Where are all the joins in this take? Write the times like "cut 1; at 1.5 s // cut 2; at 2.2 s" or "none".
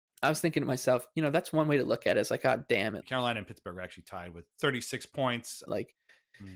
cut 1; at 3.0 s // cut 2; at 4.5 s // cut 3; at 5.7 s